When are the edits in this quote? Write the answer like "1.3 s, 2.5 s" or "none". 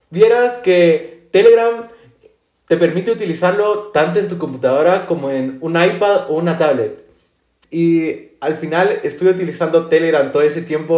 7.6 s